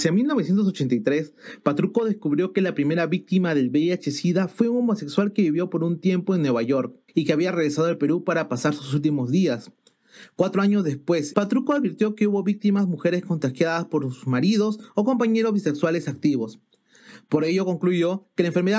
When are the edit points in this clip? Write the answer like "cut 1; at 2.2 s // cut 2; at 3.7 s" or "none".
cut 1; at 7.1 s // cut 2; at 11.3 s